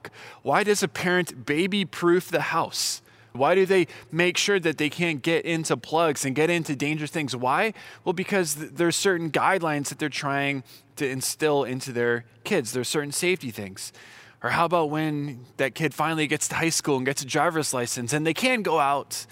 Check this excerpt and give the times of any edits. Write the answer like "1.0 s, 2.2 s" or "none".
3.3 s, 14.3 s